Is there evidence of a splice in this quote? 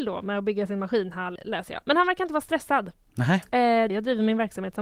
yes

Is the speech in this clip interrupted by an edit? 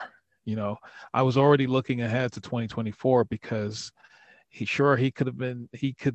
no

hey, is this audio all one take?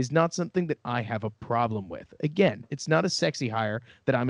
yes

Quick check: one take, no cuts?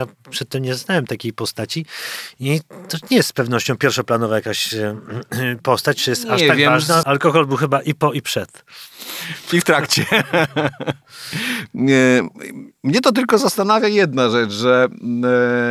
no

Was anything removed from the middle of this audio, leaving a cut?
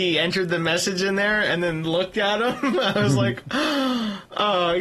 no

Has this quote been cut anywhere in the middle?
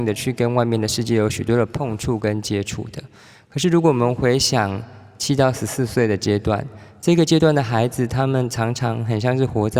no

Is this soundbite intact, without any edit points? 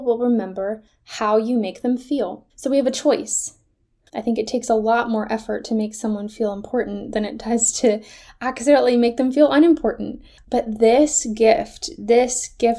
no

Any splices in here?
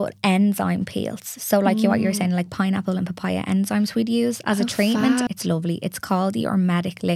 yes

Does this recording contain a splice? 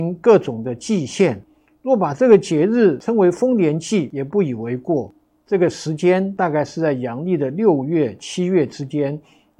no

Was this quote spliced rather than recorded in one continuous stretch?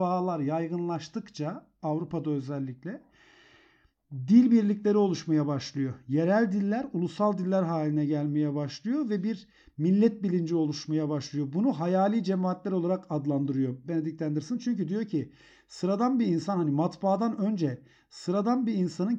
no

